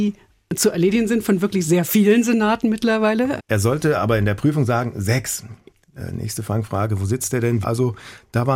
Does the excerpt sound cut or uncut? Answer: cut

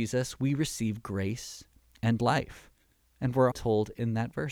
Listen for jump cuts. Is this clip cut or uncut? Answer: cut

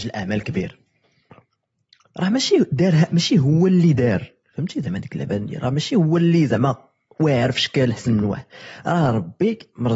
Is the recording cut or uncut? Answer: uncut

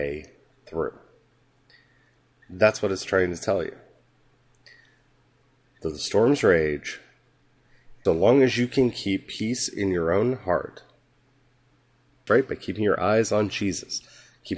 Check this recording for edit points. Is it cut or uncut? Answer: cut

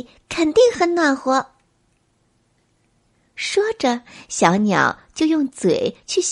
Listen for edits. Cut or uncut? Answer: uncut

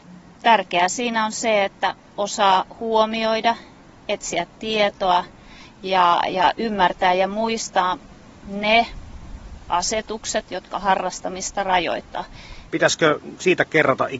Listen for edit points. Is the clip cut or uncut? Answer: cut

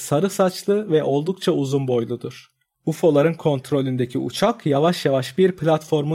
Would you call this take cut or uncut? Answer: cut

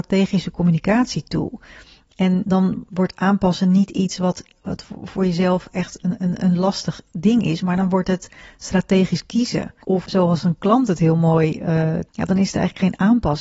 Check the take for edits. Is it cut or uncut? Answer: cut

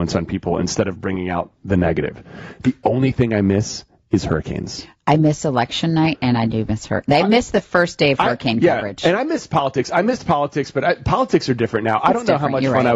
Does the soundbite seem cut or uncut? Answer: uncut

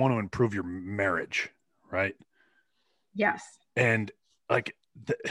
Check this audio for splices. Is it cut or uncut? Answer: uncut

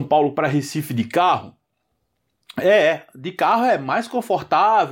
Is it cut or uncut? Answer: uncut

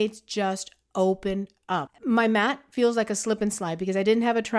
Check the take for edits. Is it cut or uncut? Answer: uncut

